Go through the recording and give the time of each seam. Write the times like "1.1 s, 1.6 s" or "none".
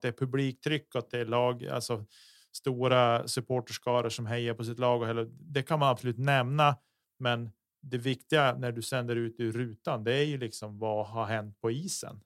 none

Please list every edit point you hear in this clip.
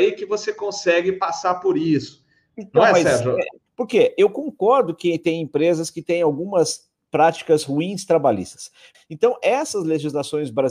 3.7 s, 8.9 s

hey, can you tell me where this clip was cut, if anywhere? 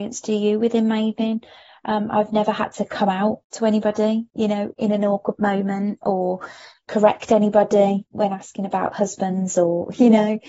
3.4 s

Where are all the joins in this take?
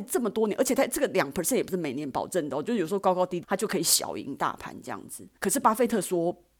3.4 s, 5.4 s

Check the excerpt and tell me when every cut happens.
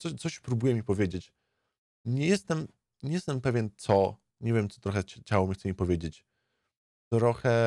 4.3 s

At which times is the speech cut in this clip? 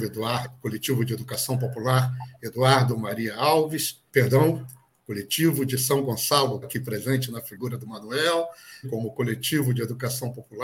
4.1 s, 6.6 s, 8.8 s

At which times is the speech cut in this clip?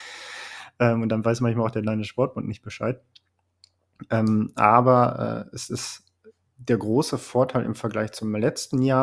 none

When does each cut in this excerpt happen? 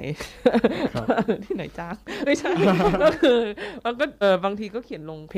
4.2 s

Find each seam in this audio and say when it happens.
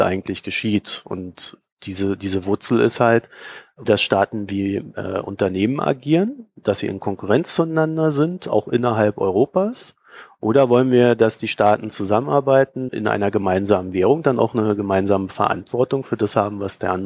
3.8 s, 12.9 s

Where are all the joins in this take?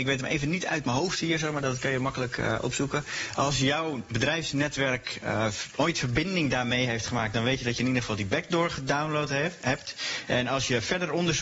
none

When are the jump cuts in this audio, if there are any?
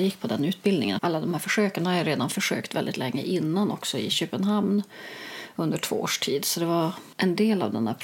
1.0 s

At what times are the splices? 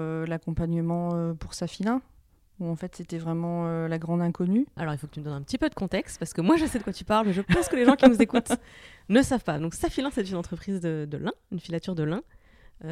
none

